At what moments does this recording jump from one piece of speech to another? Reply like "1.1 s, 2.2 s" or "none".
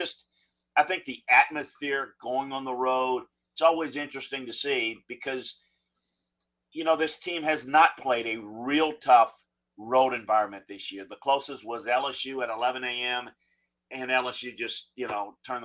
none